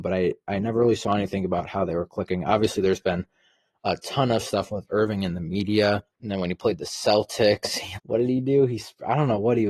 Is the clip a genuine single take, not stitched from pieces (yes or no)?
no